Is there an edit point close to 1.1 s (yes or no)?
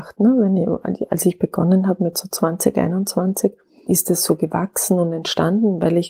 no